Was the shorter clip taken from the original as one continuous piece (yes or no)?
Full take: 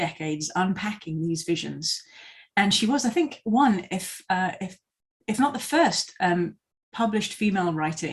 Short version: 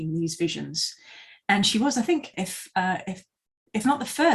no